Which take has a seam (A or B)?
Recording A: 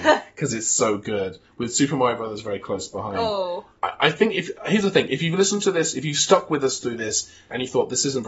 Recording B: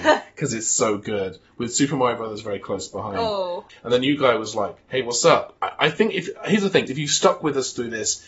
B